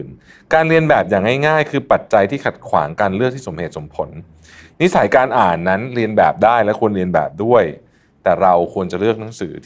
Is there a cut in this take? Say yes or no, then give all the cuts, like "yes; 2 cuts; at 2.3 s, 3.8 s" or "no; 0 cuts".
no; 0 cuts